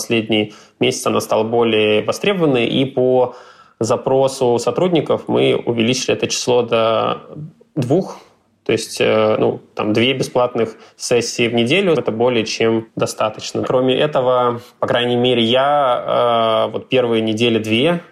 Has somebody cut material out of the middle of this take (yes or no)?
yes